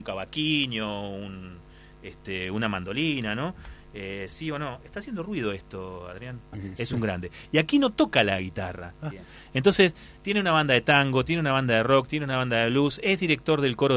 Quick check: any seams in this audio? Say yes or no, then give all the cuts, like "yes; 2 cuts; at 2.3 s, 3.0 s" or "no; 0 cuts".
yes; 2 cuts; at 6.5 s, 9.1 s